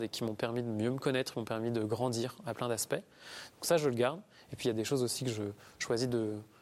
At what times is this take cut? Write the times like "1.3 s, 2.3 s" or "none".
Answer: none